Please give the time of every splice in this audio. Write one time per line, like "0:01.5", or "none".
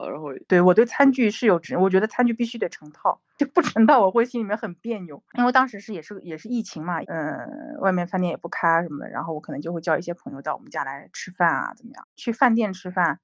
0:07.0
0:12.0